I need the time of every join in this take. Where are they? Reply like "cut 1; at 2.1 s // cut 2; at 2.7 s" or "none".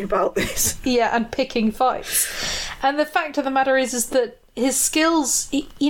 none